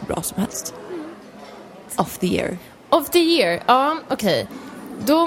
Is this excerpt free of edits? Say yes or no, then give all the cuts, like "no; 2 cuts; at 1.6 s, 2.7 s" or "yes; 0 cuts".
no; 1 cut; at 1.9 s